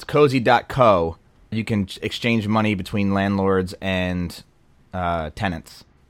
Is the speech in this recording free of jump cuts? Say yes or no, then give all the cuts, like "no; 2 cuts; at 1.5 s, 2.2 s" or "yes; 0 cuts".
no; 1 cut; at 1.5 s